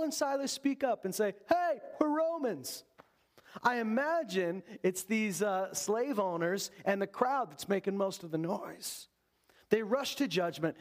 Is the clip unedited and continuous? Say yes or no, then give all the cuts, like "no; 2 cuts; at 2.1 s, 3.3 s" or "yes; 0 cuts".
yes; 0 cuts